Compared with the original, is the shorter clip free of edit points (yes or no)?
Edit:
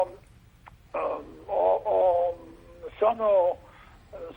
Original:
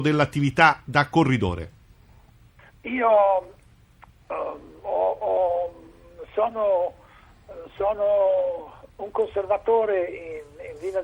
yes